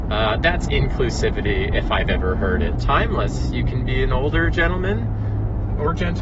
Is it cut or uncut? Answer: cut